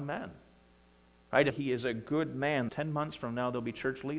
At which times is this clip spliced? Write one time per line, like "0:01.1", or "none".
0:01.5
0:02.7